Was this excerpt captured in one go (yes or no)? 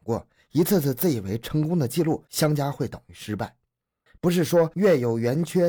no